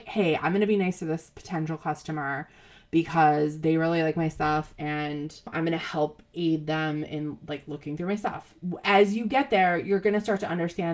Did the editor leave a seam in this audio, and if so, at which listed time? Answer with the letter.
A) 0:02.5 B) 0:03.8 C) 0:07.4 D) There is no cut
D